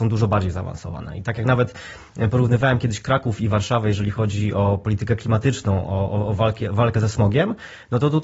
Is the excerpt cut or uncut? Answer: uncut